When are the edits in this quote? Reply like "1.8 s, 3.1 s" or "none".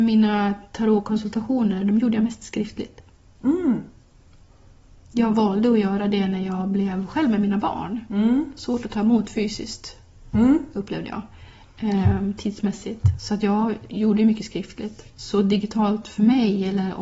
none

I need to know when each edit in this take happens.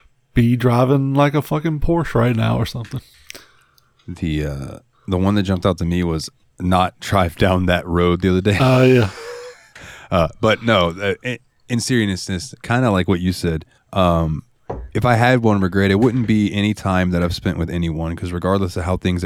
none

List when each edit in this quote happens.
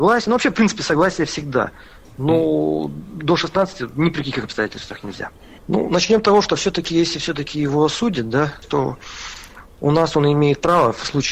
5.6 s, 8.6 s

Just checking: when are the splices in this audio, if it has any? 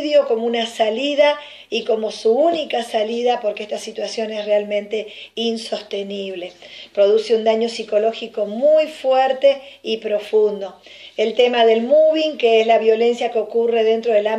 none

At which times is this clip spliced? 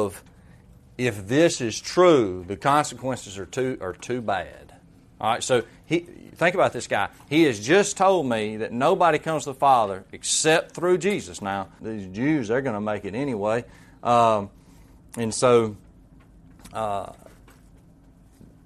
11.8 s

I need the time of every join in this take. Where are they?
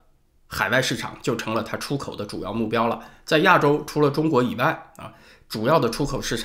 none

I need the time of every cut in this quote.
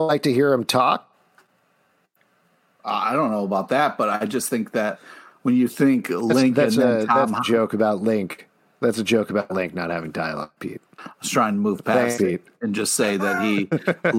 11.0 s

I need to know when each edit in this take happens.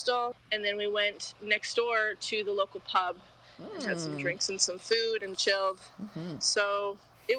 5.3 s

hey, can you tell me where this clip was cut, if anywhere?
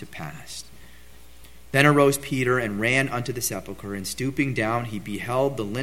1.6 s

